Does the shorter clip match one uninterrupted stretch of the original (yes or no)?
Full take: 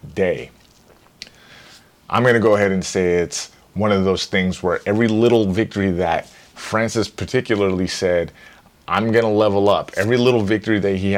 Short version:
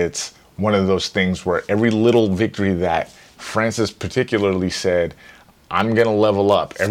yes